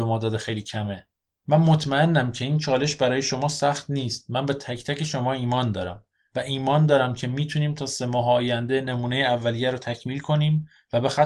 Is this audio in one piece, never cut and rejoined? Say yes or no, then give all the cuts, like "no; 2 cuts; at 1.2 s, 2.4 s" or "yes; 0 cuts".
no; 1 cut; at 1.3 s